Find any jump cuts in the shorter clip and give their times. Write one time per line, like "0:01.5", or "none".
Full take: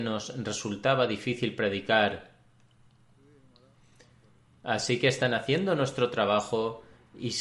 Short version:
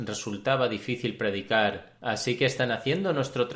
0:02.0